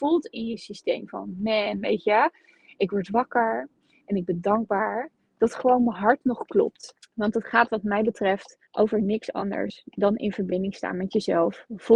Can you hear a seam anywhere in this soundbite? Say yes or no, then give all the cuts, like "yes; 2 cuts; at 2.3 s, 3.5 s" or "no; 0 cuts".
yes; 2 cuts; at 7.0 s, 8.7 s